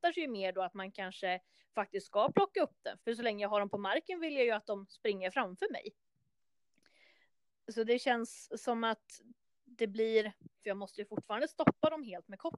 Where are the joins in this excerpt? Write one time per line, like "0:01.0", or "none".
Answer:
0:03.0
0:10.6